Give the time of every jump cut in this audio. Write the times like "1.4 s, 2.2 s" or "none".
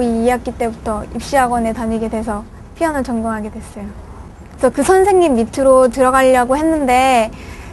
4.6 s